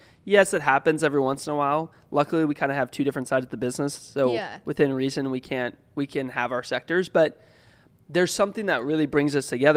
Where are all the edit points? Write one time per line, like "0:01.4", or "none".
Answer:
none